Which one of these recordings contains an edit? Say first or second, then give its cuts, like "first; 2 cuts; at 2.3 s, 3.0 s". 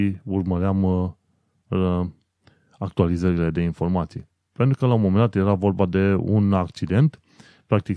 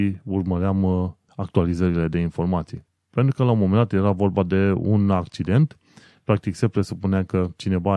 second; 1 cut; at 1.3 s